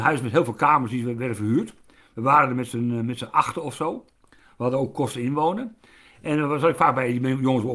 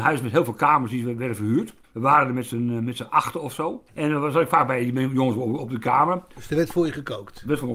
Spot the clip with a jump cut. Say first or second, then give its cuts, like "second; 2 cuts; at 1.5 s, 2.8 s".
second; 2 cuts; at 1.8 s, 3.9 s